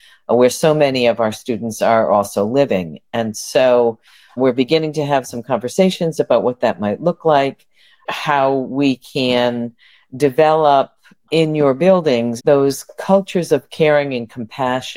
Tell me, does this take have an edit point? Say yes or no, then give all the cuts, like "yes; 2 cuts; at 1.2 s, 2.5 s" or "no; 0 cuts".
yes; 1 cut; at 12.4 s